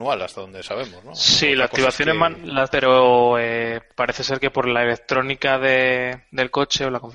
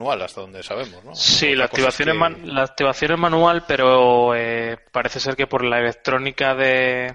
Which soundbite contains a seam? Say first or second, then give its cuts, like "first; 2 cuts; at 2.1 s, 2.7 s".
first; 1 cut; at 2.7 s